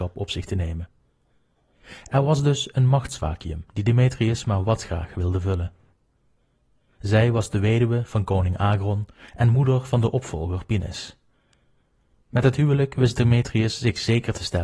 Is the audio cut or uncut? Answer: cut